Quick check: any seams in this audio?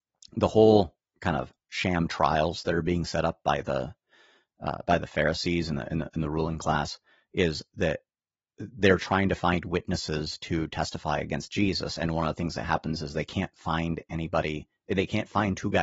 no; 0 cuts

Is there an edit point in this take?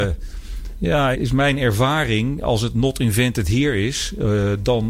yes; 1 cut; at 1.1 s

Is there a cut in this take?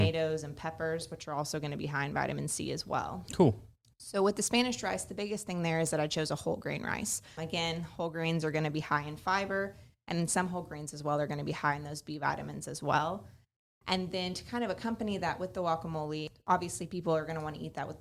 no; 0 cuts

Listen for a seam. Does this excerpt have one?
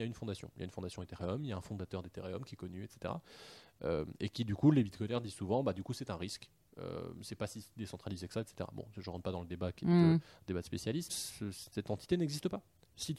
yes; 1 cut; at 11.1 s

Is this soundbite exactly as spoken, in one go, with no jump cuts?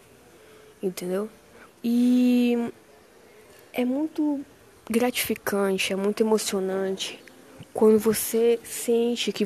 no; 1 cut; at 1.7 s

